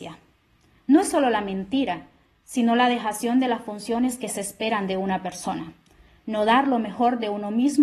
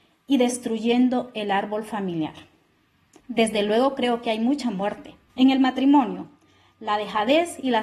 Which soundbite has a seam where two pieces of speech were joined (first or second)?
second